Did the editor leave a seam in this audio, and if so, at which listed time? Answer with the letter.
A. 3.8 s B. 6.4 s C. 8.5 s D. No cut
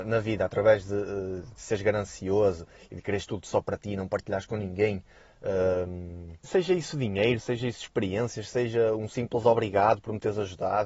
B